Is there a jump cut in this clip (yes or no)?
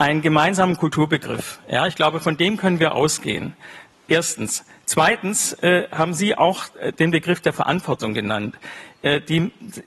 no